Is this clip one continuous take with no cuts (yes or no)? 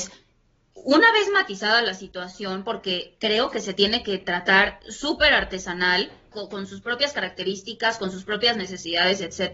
no